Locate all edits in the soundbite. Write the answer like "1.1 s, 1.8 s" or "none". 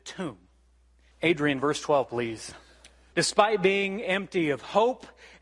1.1 s, 3.1 s